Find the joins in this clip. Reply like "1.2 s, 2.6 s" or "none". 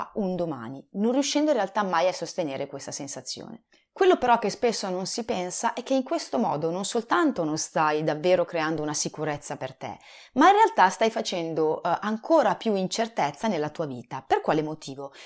none